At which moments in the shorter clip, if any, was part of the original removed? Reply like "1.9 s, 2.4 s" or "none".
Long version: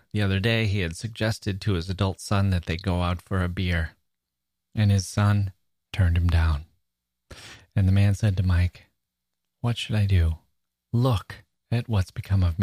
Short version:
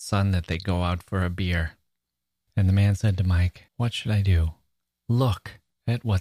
2.5 s, 3.7 s